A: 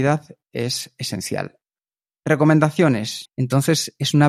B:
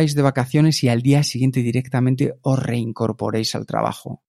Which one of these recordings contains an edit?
A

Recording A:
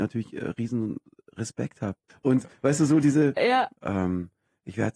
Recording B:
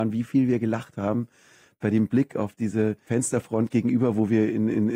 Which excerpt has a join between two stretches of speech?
A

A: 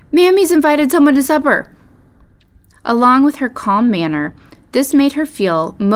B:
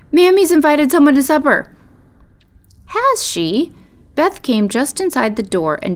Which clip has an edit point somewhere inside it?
A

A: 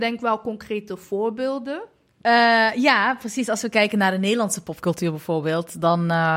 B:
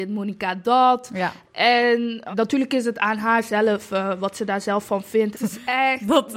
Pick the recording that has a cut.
B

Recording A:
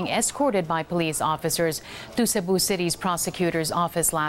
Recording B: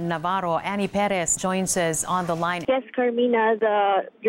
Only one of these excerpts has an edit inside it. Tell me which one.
B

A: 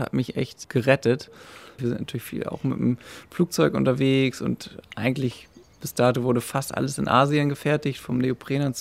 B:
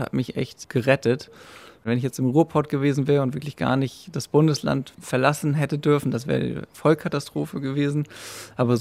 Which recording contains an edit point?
A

